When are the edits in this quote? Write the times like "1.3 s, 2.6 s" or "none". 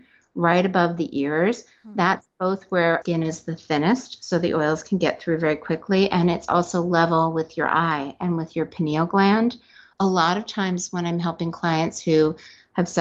none

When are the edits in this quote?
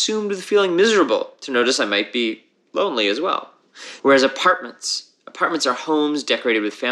4.0 s

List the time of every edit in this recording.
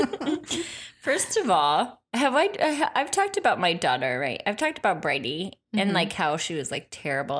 2.1 s

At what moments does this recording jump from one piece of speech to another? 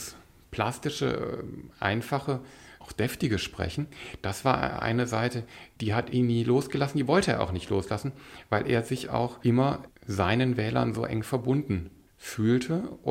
none

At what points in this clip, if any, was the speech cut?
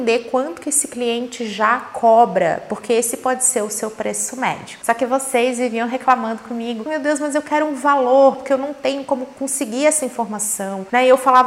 6.9 s, 8.3 s

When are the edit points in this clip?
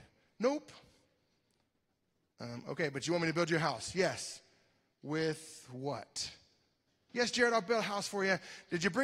7.1 s

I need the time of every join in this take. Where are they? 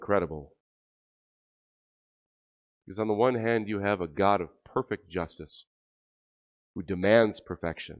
none

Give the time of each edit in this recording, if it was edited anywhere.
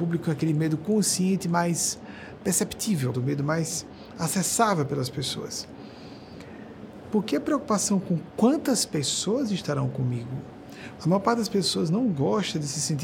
3.1 s, 7.0 s, 11.0 s

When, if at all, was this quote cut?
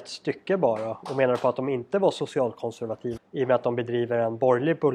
3.2 s

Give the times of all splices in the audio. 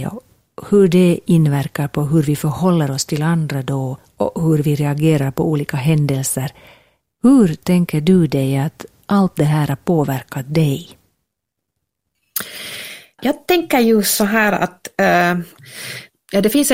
none

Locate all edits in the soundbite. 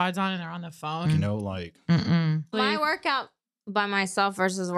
1.0 s, 2.5 s

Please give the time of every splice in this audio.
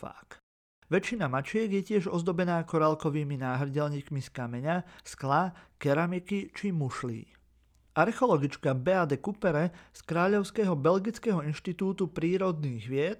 none

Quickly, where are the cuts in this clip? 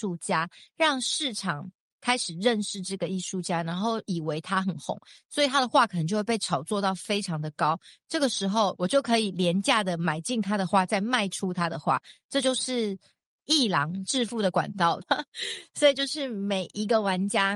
15.0 s

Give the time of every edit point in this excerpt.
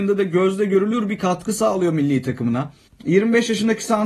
2.9 s

